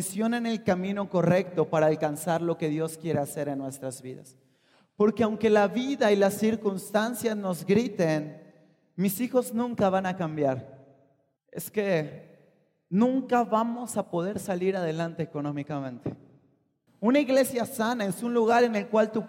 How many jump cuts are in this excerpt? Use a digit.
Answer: 2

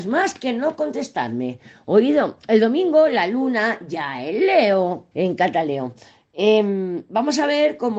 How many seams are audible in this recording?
1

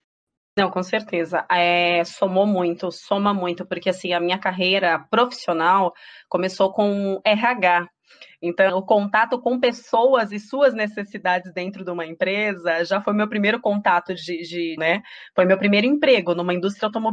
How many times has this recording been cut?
2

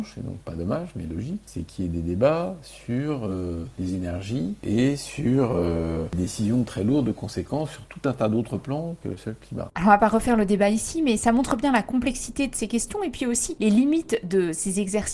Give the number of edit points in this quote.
0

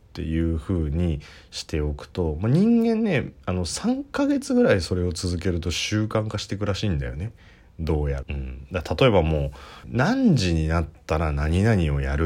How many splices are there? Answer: 2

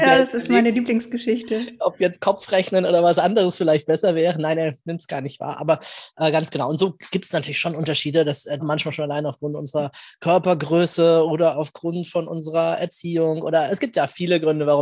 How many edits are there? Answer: 1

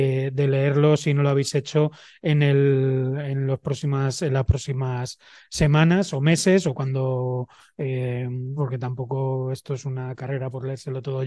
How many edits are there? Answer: 1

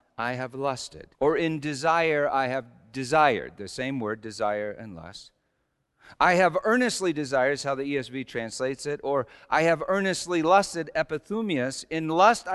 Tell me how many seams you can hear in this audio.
1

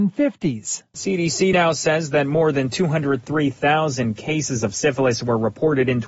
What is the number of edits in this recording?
0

